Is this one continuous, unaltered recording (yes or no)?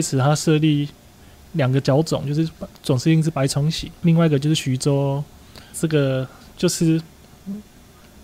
no